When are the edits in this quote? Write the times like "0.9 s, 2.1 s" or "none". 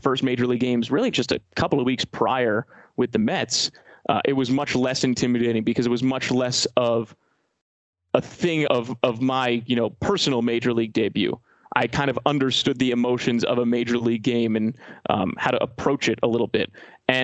8.7 s

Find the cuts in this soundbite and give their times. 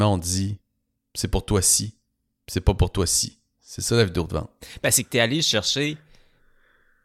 none

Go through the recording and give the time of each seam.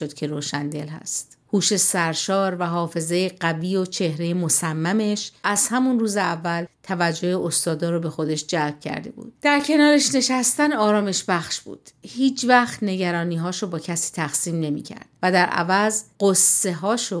none

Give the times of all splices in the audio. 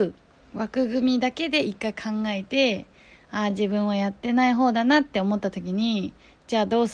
none

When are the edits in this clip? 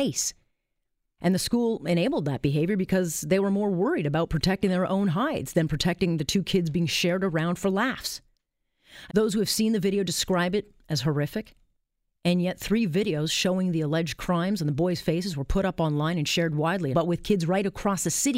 1.2 s, 9.1 s, 16.9 s

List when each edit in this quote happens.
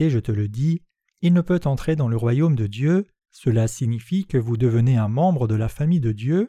1.1 s, 3.2 s

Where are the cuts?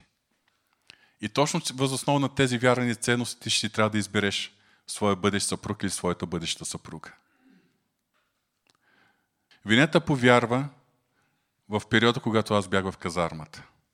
9.5 s

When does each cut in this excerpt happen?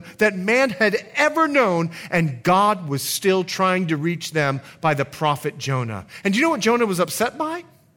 none

